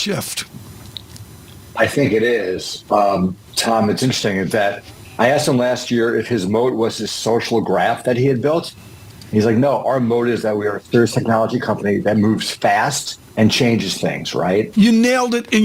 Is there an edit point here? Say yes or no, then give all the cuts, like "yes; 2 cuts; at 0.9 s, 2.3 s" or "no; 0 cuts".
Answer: yes; 2 cuts; at 13.3 s, 14.7 s